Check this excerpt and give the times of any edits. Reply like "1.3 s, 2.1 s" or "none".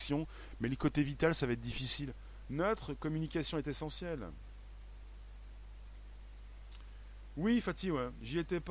none